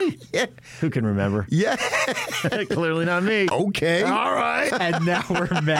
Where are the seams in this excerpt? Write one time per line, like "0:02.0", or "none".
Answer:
0:03.5
0:04.7